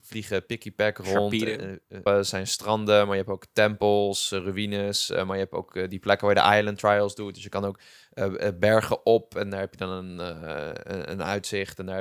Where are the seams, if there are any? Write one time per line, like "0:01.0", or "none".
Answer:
0:02.1